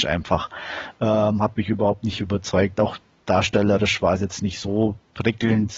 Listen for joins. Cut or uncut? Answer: uncut